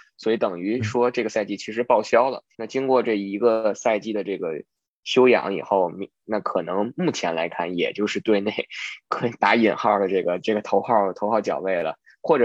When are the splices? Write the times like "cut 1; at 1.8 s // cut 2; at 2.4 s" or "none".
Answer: cut 1; at 2.5 s // cut 2; at 6.2 s